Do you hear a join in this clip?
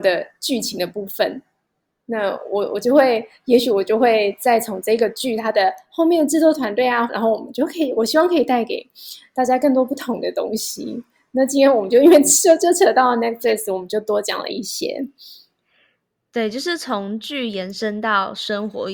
yes; 1 cut; at 7.1 s

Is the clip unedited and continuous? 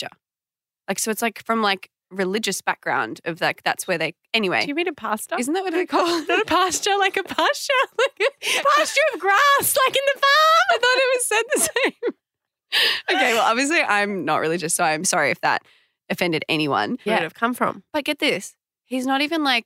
no; 2 cuts; at 15.0 s, 17.1 s

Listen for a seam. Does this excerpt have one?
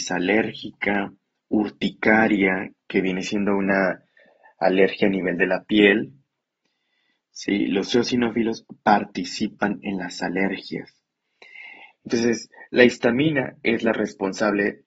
yes; 1 cut; at 11.9 s

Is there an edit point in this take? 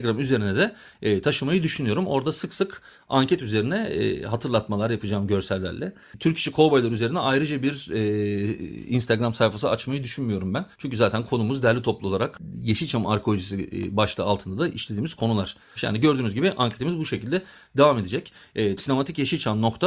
yes; 3 cuts; at 10.7 s, 15.8 s, 18.8 s

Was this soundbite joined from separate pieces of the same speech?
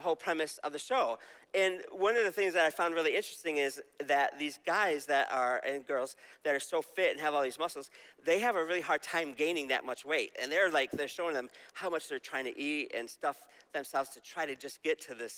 no; 0 cuts

